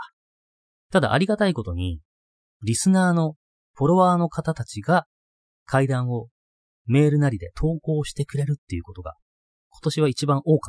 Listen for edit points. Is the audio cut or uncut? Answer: cut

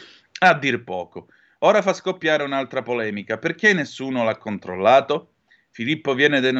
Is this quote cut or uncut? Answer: uncut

